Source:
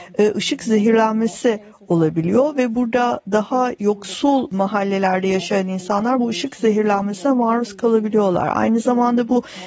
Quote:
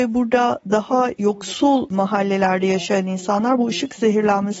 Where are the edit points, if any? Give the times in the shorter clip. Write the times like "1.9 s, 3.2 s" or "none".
none